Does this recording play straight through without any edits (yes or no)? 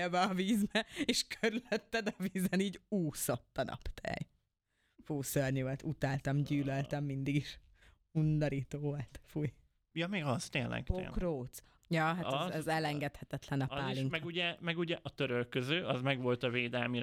no